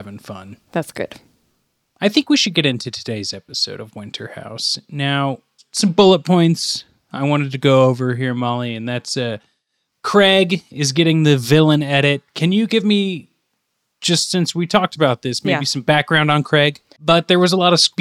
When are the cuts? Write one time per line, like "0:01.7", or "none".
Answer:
0:17.0